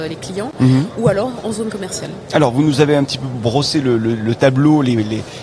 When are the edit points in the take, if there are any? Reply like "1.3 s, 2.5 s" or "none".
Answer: none